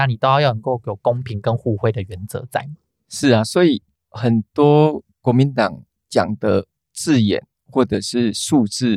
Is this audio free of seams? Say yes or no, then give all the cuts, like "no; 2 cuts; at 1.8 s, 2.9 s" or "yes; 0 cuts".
yes; 0 cuts